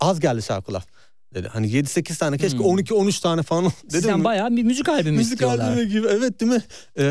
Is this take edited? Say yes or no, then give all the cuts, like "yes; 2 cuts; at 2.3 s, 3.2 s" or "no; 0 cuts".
no; 0 cuts